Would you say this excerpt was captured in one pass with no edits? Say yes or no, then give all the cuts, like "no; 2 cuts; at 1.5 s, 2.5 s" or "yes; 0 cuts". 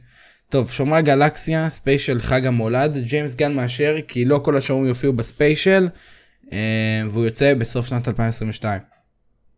yes; 0 cuts